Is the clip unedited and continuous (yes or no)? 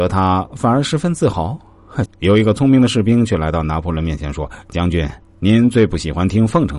no